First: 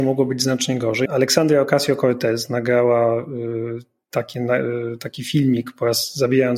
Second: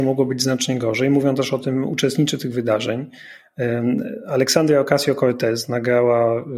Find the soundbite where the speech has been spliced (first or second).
first